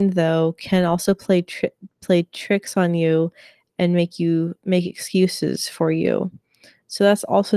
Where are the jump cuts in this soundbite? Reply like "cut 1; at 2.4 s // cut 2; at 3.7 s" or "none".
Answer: none